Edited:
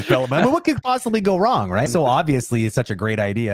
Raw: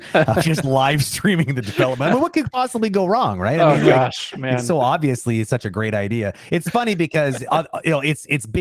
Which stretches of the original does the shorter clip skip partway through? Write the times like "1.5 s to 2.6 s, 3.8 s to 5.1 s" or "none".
3.5 s to 4.6 s

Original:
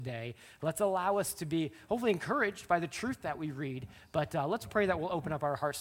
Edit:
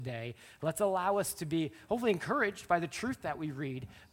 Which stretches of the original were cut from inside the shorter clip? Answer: none

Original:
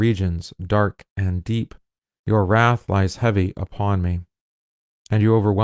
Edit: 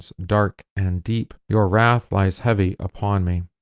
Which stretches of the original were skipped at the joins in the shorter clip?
1.8 s to 2.2 s

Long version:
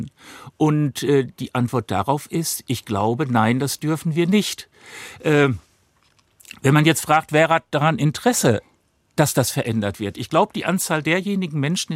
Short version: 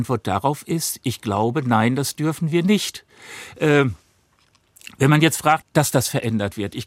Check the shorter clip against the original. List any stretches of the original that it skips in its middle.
7.3 s to 9.0 s

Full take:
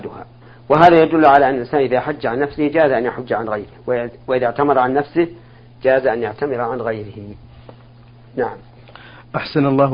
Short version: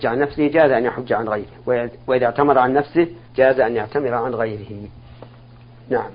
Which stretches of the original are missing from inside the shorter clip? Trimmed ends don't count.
5.5 s to 5.7 s

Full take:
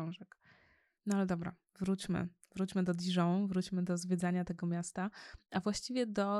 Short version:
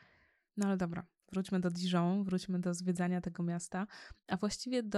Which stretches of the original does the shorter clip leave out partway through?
1.7 s to 2.5 s

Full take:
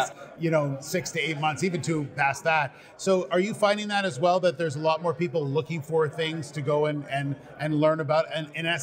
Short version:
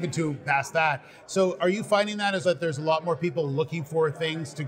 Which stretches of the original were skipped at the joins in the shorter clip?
4.1 s to 4.4 s

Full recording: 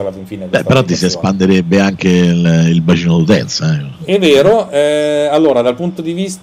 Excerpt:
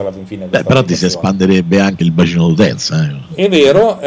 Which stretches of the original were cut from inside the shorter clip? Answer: 2.0 s to 2.7 s

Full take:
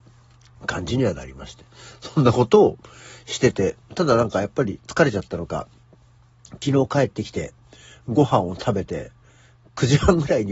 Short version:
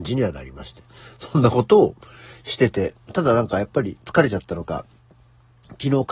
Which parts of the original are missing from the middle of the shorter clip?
none

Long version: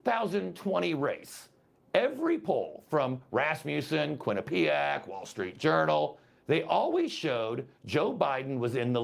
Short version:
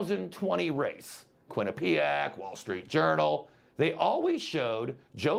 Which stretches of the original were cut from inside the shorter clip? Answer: 1.7 s to 4.2 s

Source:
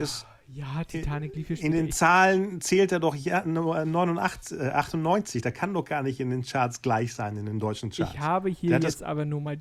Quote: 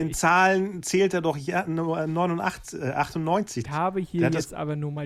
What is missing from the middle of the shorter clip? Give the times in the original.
5.4 s to 8.1 s

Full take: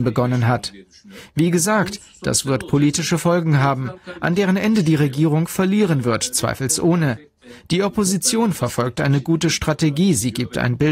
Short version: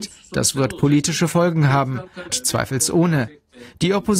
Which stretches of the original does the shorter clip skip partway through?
4.2 s to 6.2 s

